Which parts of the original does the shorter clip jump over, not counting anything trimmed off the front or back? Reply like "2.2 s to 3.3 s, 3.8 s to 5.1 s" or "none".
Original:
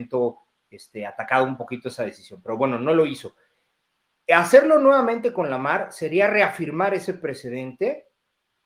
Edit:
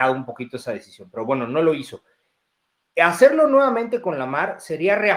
none